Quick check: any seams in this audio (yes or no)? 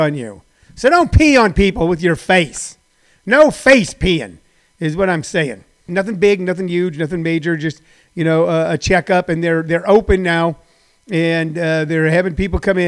yes